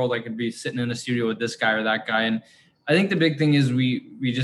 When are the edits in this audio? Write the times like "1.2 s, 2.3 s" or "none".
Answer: none